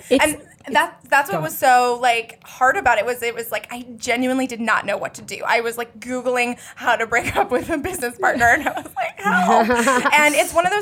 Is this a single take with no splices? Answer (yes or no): yes